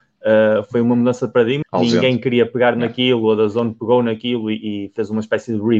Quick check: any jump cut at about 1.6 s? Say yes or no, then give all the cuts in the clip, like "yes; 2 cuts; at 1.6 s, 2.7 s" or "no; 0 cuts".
yes; 1 cut; at 1.6 s